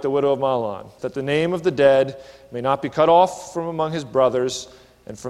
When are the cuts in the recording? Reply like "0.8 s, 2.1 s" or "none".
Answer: 1.0 s